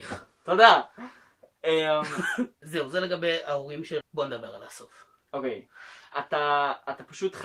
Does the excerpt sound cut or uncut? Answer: cut